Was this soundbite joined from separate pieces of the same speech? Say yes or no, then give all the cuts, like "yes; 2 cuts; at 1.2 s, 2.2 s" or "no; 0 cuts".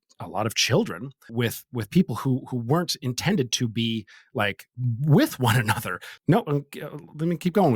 yes; 2 cuts; at 1.3 s, 6.2 s